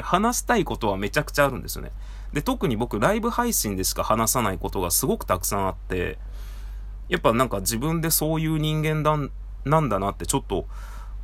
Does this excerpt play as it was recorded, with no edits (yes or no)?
yes